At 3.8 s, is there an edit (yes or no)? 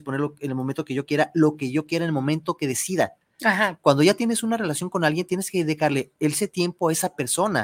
no